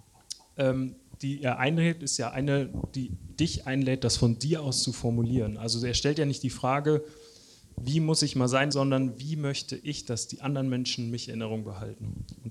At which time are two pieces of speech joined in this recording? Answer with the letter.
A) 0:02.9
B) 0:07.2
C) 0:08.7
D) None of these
C